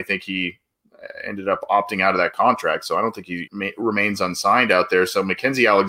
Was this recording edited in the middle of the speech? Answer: yes; 1 cut; at 3.5 s

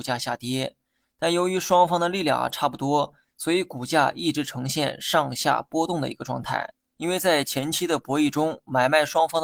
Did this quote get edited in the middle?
yes; 1 cut; at 6.9 s

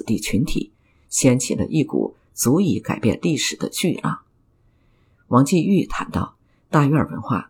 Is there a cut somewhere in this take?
no; 0 cuts

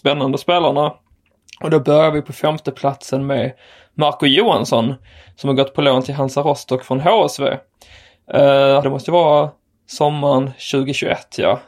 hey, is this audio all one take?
no; 1 cut; at 8.8 s

